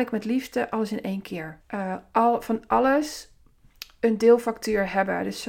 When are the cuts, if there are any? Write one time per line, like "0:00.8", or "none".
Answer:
0:01.6